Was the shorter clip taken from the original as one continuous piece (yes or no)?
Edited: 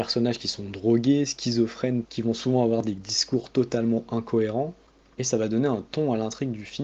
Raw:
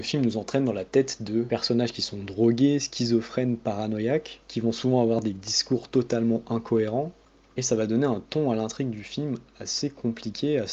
no